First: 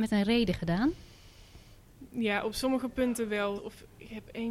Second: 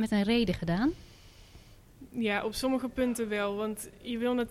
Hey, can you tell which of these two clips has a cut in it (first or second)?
first